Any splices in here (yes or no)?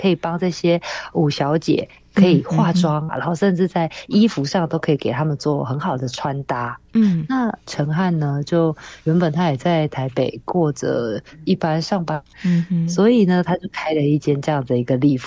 yes